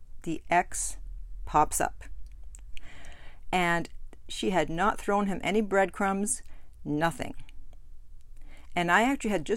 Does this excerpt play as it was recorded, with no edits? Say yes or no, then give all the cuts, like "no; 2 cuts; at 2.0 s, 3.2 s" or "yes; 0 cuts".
no; 1 cut; at 2.7 s